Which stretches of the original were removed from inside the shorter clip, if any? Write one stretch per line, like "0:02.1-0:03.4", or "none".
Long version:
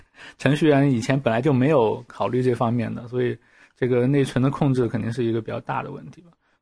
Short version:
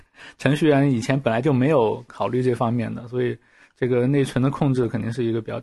none